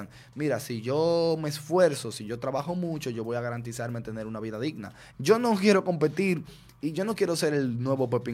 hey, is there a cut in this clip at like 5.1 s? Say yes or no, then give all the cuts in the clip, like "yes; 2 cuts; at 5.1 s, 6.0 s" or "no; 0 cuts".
yes; 1 cut; at 5.1 s